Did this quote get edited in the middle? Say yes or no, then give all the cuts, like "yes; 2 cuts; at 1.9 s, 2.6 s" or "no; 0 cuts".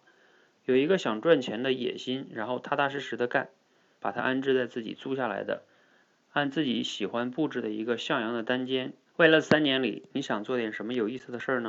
yes; 2 cuts; at 3.9 s, 9.1 s